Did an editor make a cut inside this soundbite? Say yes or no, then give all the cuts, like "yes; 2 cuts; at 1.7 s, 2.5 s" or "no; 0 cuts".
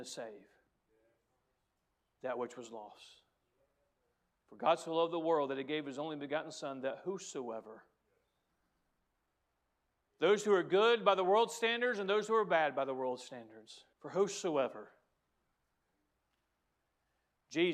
yes; 1 cut; at 13.9 s